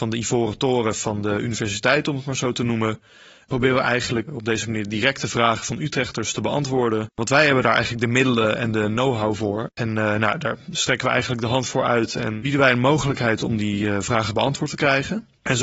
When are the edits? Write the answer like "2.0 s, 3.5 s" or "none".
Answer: 4.3 s